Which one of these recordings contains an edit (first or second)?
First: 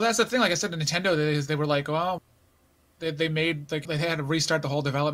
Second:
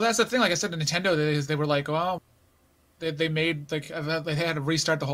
first